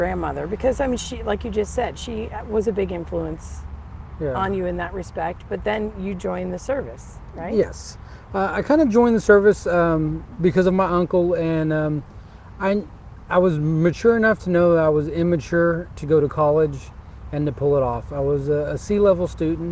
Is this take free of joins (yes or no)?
yes